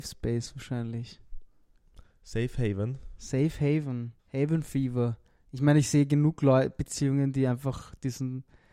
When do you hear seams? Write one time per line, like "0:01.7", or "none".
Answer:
0:04.2